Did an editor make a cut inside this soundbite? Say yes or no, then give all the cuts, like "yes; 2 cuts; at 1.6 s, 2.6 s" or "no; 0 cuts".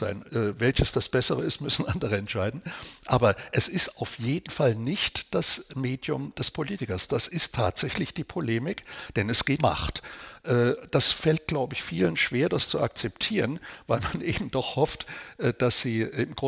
yes; 1 cut; at 9.6 s